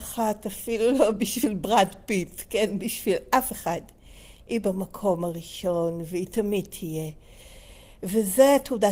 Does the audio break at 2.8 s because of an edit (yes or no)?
no